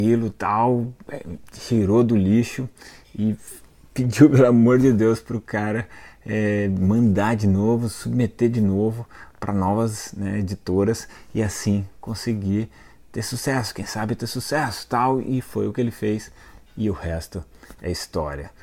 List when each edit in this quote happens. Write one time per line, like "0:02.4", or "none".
none